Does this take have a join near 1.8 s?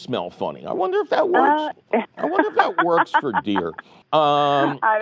no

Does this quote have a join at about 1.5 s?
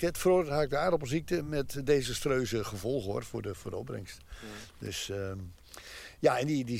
no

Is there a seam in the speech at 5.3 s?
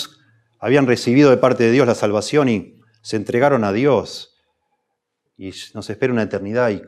yes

